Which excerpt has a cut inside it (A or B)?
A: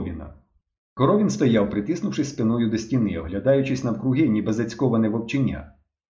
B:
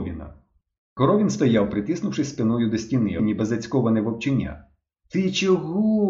B